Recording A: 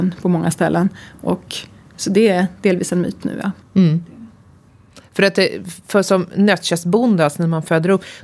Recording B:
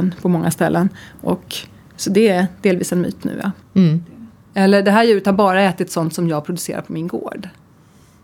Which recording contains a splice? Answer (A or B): B